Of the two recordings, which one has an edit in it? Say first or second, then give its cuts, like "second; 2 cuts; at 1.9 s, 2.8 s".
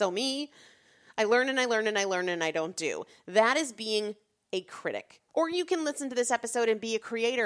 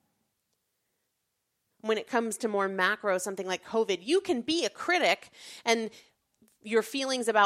first; 1 cut; at 5.3 s